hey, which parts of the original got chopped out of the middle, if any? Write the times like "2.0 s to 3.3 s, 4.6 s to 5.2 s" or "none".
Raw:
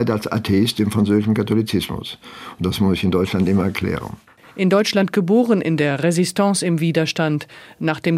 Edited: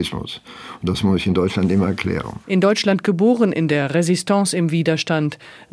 4.2 s to 4.5 s